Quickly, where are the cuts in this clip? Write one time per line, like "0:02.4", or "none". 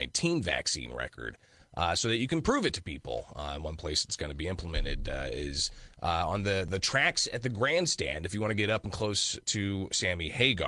none